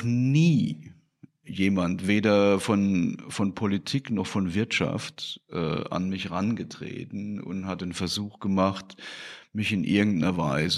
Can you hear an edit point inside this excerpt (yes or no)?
no